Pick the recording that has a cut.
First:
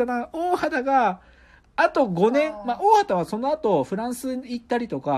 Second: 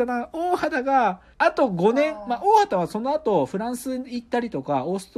second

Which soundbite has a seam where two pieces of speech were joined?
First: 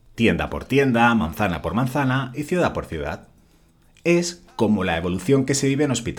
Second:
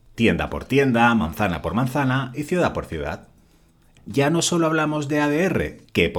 second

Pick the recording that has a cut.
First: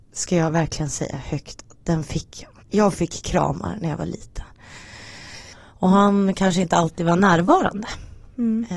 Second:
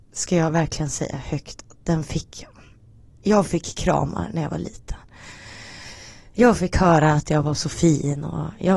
first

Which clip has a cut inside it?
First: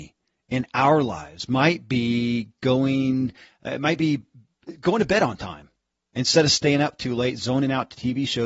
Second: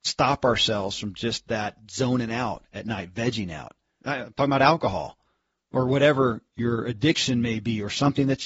second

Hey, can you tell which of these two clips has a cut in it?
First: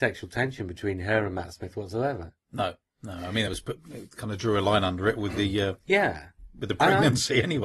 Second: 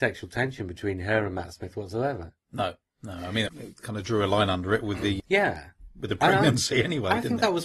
second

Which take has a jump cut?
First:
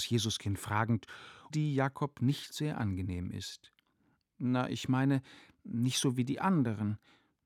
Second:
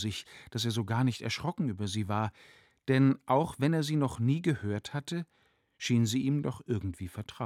first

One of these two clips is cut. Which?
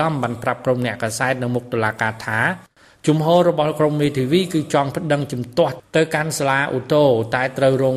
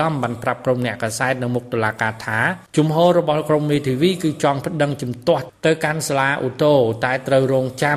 second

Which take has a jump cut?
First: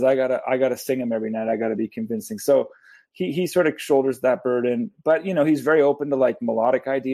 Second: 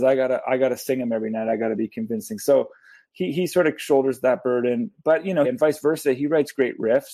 second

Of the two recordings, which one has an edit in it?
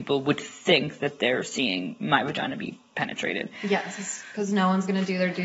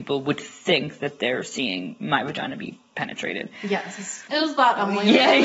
second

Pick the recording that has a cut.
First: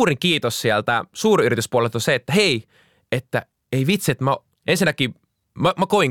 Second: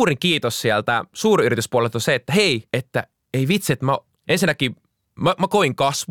second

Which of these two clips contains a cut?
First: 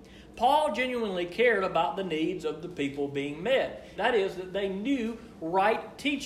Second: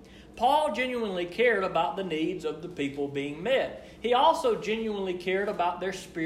first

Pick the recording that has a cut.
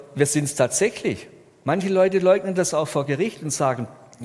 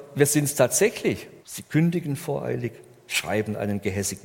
second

